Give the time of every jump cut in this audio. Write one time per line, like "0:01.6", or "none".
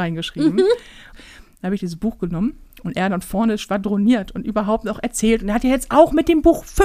0:01.1